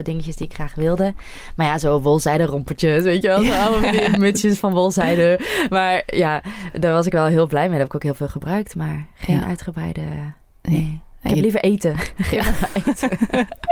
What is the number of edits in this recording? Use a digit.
0